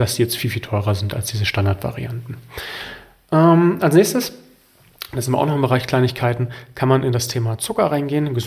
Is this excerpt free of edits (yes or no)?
yes